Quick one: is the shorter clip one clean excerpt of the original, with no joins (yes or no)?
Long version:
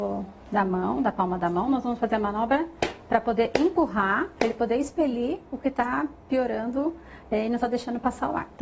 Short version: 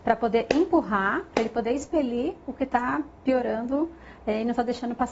yes